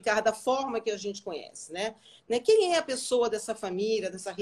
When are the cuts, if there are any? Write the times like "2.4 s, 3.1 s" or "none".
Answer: 2.2 s